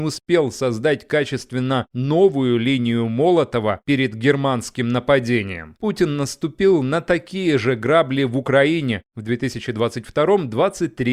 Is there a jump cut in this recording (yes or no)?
no